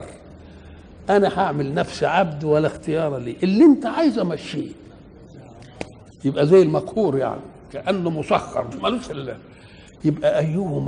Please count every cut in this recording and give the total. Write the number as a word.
one